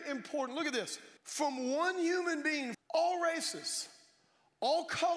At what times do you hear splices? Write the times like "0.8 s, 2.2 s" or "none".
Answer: 1.2 s, 2.7 s